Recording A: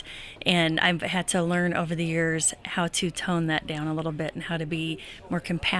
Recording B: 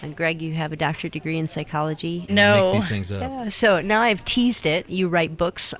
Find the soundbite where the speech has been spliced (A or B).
B